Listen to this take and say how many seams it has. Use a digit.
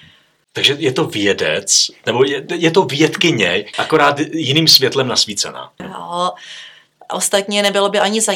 2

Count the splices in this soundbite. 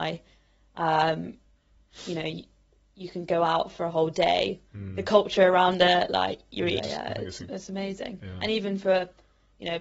2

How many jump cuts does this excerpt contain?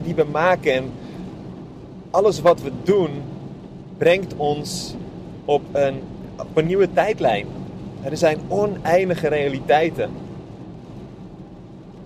0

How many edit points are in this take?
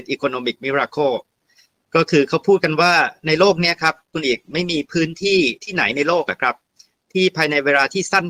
1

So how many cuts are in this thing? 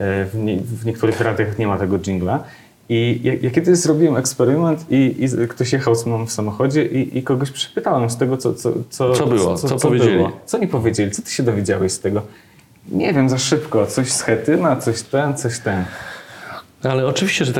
0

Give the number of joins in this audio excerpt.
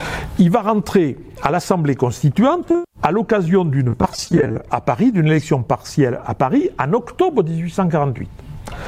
1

